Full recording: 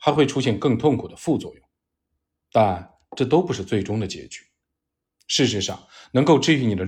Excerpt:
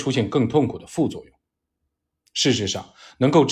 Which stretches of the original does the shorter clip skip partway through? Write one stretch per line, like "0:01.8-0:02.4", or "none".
0:02.5-0:05.1

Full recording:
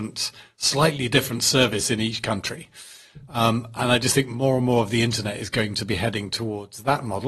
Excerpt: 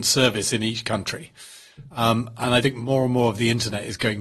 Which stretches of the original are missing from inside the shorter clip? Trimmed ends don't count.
0:04.0-0:04.1

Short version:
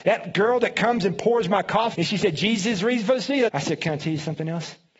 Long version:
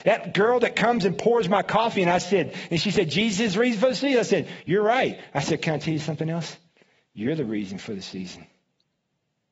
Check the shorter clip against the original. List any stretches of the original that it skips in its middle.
0:01.9-0:02.7
0:04.2-0:05.3

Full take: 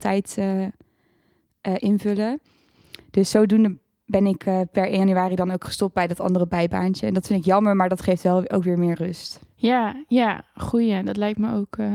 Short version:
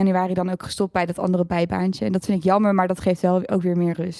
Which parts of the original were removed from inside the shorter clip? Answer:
none

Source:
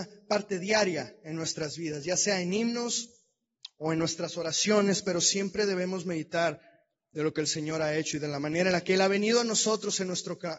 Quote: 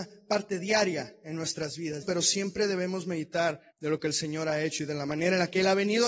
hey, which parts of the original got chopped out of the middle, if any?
0:02.0-0:05.0
0:06.7-0:07.0

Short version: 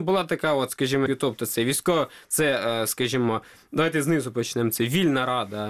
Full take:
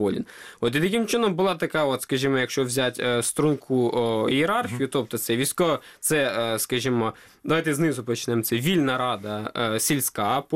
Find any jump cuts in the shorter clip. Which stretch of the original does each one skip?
0:02.4-0:04.8

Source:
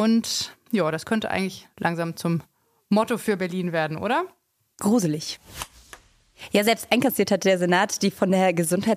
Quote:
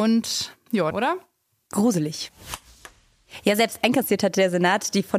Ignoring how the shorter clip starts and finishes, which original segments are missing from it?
0:00.9-0:04.0

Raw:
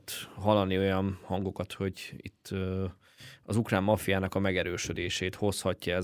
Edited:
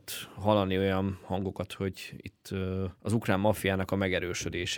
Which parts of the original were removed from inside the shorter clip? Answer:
0:02.9-0:03.4

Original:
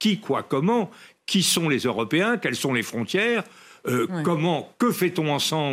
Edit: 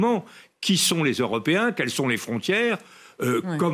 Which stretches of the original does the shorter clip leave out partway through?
none

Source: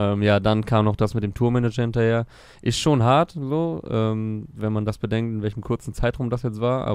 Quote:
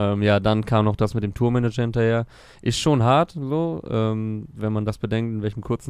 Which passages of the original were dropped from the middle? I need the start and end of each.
none

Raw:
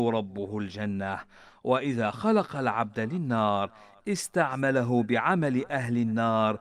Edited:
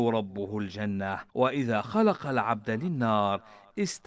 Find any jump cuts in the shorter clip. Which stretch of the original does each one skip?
0:01.3-0:01.6

